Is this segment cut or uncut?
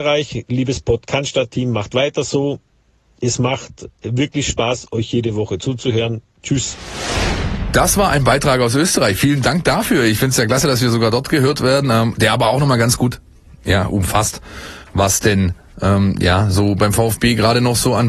uncut